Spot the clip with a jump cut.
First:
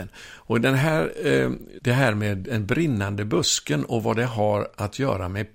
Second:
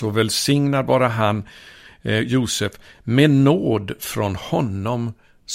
first; 1 cut; at 1.8 s

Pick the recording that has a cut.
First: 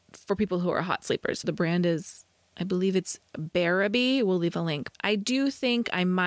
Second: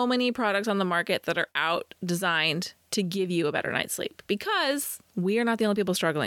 first; 1 cut; at 1.4 s

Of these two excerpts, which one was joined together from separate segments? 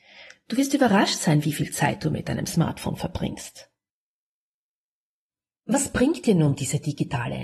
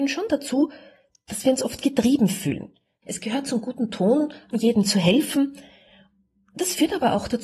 second; 2 cuts; at 3.0 s, 4.5 s

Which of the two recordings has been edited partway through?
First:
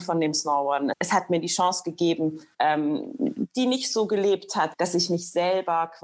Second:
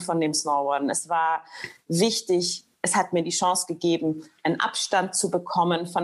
first; 3 cuts; at 0.9 s, 2.5 s, 4.7 s

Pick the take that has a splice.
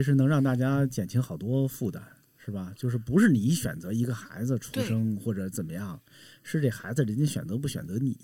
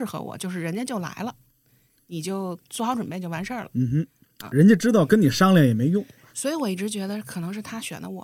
second; 1 cut; at 6.3 s

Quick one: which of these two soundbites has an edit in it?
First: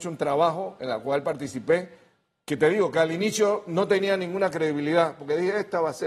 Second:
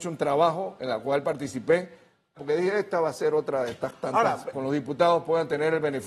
second; 2 cuts; at 2.4 s, 4.5 s

